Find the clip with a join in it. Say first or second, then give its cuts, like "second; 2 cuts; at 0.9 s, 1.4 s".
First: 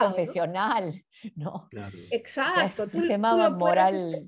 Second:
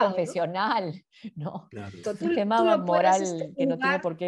second; 1 cut; at 2.0 s